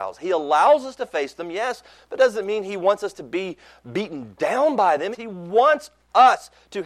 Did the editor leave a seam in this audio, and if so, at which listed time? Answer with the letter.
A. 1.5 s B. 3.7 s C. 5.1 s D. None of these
C